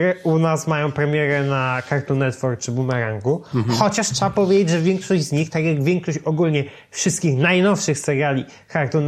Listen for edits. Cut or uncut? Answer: uncut